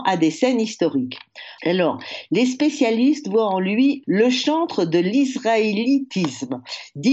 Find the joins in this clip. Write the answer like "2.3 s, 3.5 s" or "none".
1.6 s, 4.0 s